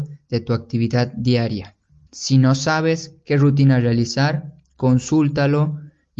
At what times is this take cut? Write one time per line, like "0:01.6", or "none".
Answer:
0:02.1